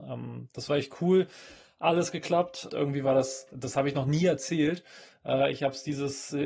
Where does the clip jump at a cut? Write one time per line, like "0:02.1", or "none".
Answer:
0:02.7